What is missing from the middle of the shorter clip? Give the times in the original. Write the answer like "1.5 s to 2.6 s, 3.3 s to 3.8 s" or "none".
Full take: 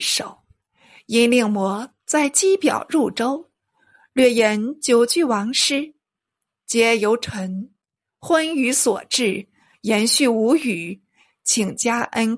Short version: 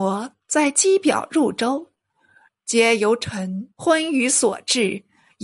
4.1 s to 6.5 s, 7.7 s to 8.2 s